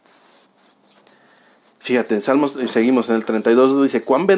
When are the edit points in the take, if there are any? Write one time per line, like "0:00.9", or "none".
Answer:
none